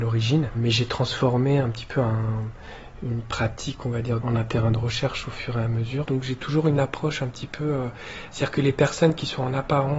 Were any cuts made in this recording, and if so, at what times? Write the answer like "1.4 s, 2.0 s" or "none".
4.2 s, 6.0 s